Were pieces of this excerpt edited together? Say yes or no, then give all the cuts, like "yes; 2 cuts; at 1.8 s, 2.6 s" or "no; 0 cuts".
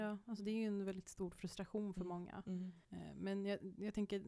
yes; 1 cut; at 2.8 s